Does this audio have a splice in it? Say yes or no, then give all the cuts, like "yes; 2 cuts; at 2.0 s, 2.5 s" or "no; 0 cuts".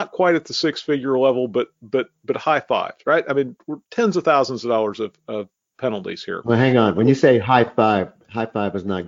no; 0 cuts